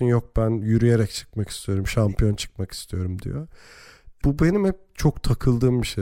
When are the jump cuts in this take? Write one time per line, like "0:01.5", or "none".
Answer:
0:04.2